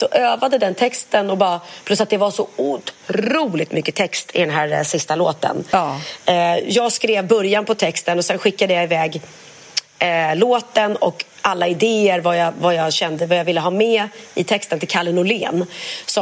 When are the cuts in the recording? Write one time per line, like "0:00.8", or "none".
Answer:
none